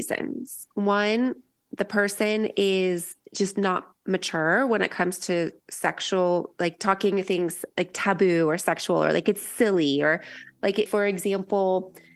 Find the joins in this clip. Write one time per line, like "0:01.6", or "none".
0:10.9